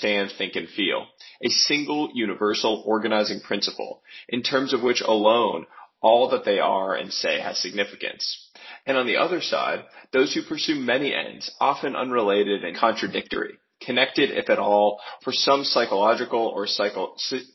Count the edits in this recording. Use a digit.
2